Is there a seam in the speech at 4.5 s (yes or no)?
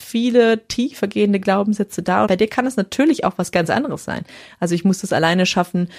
no